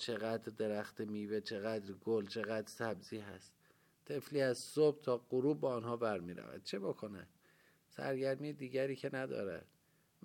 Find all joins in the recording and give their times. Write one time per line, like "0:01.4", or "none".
none